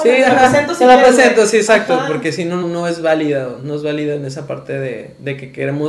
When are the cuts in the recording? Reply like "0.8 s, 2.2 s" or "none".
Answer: 2.6 s